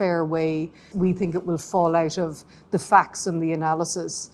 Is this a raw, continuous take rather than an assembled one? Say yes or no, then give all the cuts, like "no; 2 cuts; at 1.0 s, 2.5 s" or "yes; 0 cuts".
no; 1 cut; at 0.9 s